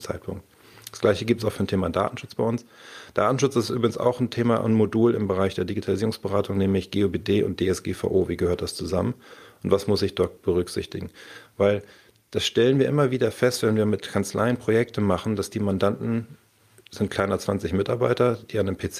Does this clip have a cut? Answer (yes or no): no